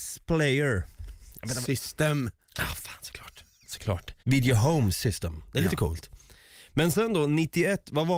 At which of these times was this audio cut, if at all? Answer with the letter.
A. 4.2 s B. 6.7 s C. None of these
A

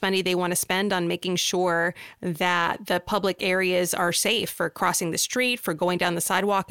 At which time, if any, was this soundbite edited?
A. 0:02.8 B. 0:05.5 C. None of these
C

